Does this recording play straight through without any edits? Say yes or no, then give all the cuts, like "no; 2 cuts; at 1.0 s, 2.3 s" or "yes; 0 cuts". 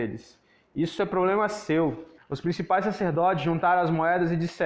no; 1 cut; at 2.2 s